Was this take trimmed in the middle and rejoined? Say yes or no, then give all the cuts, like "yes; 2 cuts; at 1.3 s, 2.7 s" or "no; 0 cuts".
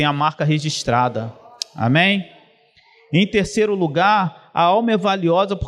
no; 0 cuts